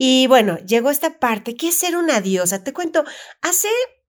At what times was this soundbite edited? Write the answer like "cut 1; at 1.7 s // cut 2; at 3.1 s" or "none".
none